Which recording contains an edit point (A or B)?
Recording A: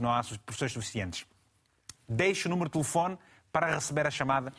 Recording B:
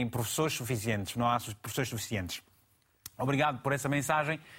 A